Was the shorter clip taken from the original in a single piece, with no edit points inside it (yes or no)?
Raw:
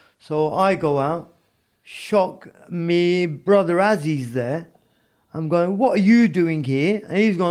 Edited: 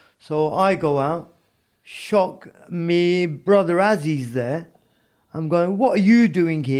yes